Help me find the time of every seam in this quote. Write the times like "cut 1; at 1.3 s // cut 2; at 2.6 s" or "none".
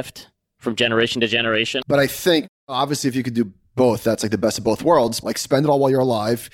cut 1; at 1.8 s // cut 2; at 5.2 s

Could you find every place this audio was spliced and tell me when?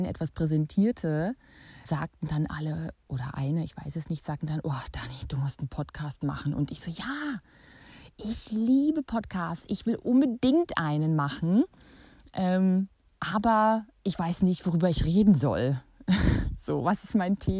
cut 1; at 1.8 s

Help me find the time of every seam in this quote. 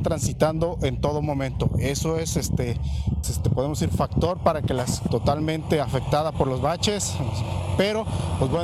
cut 1; at 3.2 s // cut 2; at 5.1 s

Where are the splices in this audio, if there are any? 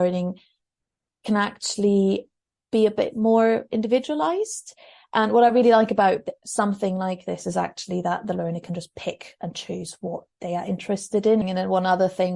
cut 1; at 11.4 s

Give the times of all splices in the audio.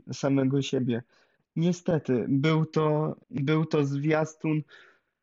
cut 1; at 1.4 s // cut 2; at 3.2 s

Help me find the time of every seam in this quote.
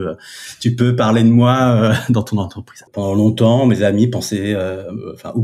cut 1; at 2.9 s

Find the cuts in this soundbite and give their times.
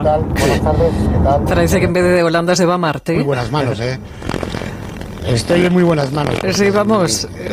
none

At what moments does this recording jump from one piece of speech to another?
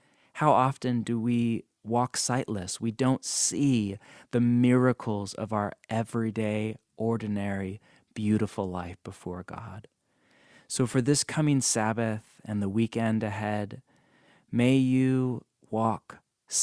none

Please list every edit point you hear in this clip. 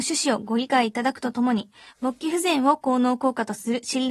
none

